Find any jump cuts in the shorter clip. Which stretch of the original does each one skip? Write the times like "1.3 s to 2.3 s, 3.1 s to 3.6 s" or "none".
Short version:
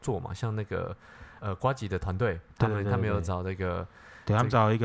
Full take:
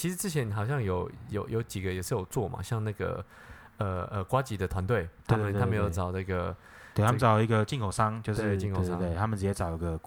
3.7 s to 4.1 s

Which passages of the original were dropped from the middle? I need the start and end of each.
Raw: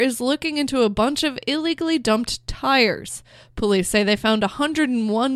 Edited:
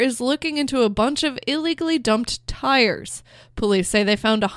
none

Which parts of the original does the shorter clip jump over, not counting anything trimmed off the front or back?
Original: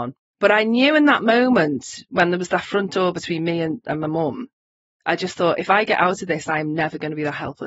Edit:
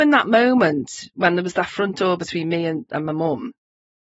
none

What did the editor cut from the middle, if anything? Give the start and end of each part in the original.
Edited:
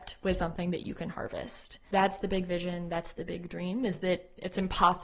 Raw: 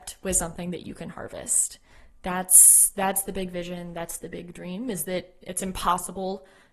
1.9 s to 2.9 s

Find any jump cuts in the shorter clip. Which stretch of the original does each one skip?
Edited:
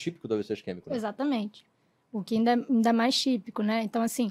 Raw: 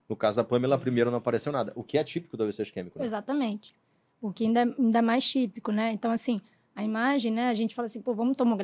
none

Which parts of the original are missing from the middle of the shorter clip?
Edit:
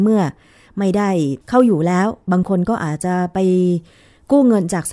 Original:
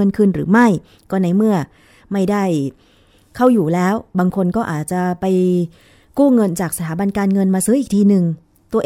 2.7 s to 3.3 s

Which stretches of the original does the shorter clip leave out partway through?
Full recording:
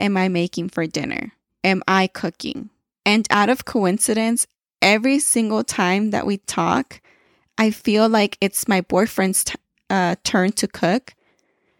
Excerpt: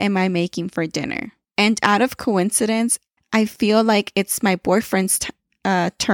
1.4 s to 2.9 s, 4.7 s to 7.4 s

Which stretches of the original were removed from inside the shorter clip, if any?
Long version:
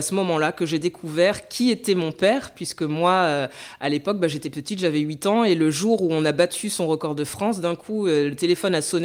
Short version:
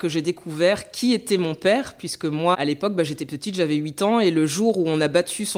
3.1 s to 3.8 s

